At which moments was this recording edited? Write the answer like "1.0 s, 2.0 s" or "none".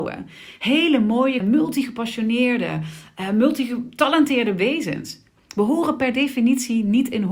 1.4 s

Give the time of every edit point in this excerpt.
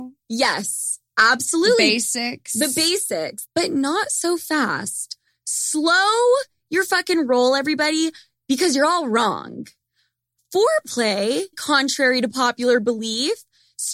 3.4 s, 11.5 s

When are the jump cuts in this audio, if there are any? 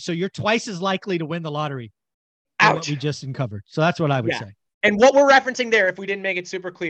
none

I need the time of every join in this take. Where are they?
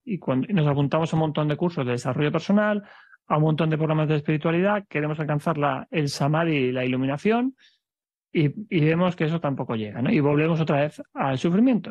none

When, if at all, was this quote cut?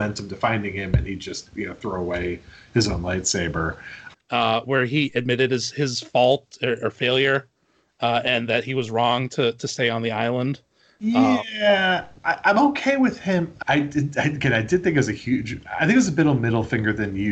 4.1 s, 13.6 s

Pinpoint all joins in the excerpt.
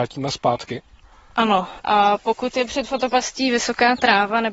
none

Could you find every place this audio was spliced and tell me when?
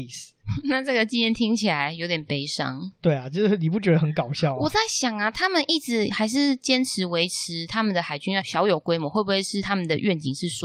8.4 s

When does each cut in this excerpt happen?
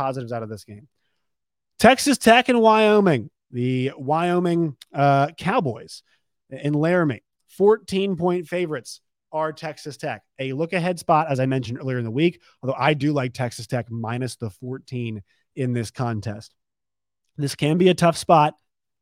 none

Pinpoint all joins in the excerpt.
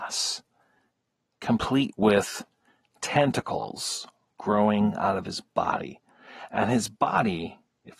none

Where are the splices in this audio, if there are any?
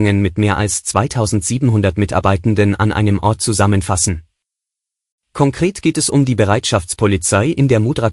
none

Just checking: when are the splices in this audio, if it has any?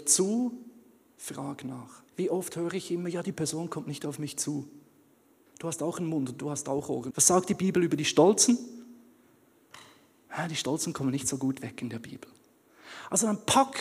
2.1 s, 5.5 s, 7.1 s

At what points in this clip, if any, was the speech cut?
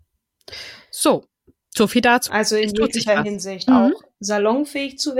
2.3 s, 3.7 s

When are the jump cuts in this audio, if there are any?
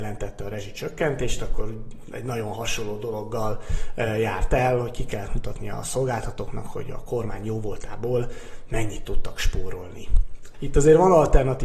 10.5 s

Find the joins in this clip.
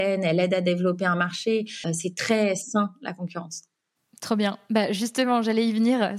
1.8 s

